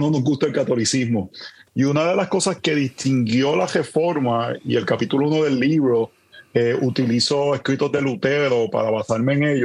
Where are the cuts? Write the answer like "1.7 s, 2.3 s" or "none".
1.7 s

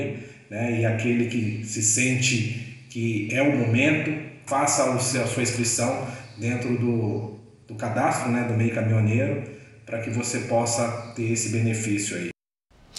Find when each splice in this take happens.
4.5 s

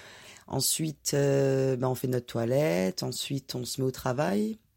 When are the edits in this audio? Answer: none

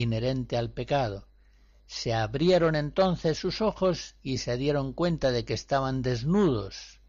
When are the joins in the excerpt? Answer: none

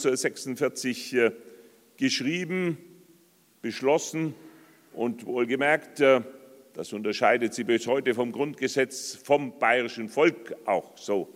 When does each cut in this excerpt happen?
none

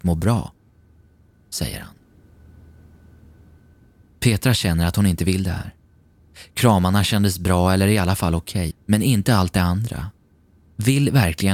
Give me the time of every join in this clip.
8.7 s

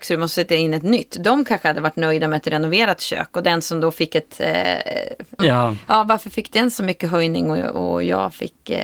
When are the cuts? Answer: 5.4 s

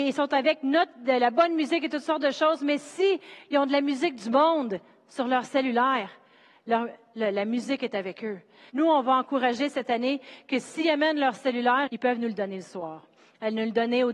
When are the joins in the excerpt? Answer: 8.7 s, 11.9 s

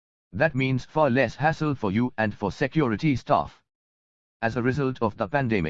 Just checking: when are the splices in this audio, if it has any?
4.3 s

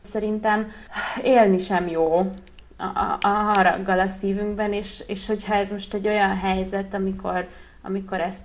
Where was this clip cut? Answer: none

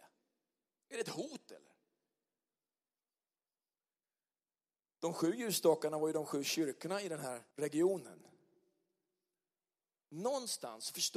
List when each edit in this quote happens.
7.5 s

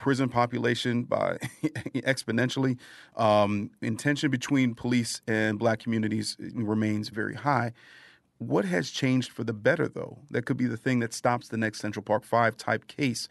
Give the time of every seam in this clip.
7.1 s

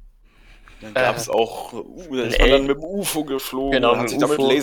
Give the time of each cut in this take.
none

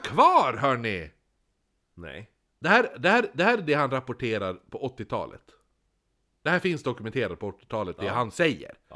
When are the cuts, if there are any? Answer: 2.5 s

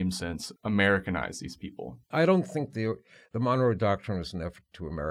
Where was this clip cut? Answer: 2.1 s

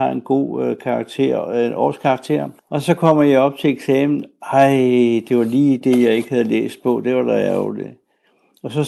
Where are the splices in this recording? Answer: 2.6 s

